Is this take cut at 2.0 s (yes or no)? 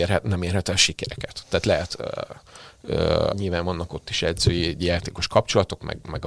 yes